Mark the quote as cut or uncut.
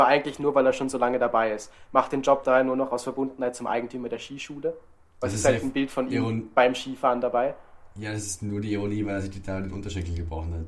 cut